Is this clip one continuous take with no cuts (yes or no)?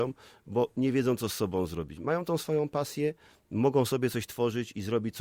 yes